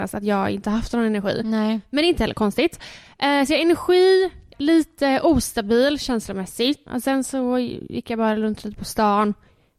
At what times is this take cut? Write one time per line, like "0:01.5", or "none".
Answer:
0:04.5
0:06.9